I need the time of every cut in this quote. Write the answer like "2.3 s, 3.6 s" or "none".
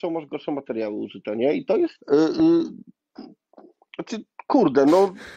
2.0 s